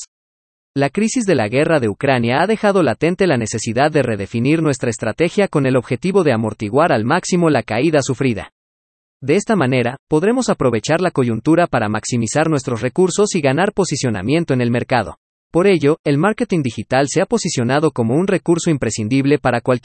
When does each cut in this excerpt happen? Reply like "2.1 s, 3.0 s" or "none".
15.4 s